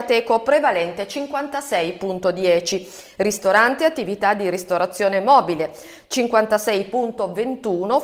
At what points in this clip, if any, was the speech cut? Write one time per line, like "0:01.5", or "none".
none